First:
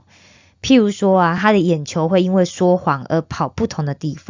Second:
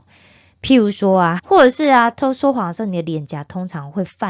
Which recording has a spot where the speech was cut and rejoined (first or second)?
second